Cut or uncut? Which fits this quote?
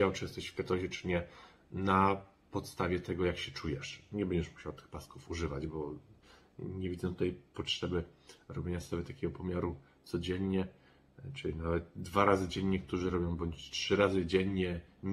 uncut